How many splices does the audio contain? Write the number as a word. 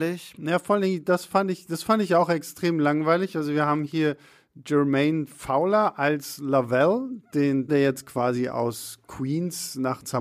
one